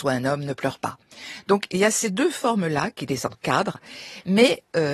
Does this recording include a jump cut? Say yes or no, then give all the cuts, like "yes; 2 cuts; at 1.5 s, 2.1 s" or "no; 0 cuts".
no; 0 cuts